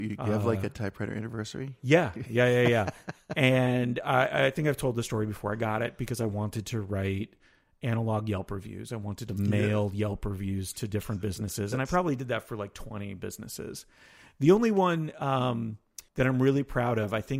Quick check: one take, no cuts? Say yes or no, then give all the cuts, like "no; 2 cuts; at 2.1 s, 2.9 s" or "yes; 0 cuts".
no; 1 cut; at 16.1 s